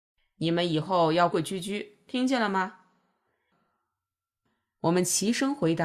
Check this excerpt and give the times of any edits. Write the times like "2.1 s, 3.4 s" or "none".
1.3 s